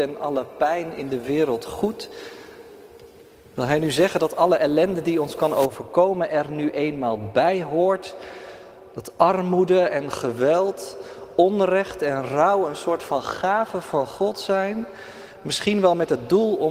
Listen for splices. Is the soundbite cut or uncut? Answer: uncut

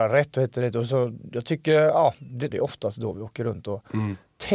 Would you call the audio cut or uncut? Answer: cut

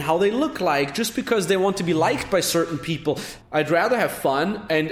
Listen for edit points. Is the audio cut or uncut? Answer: cut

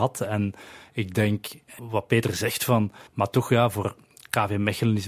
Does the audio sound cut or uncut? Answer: cut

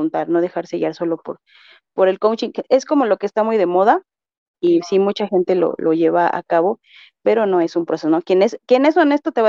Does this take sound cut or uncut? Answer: uncut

